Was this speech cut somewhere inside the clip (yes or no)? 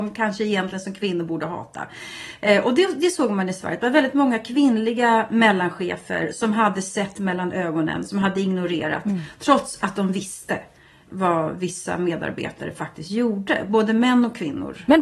yes